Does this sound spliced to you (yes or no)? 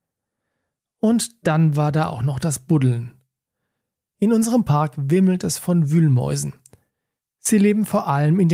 no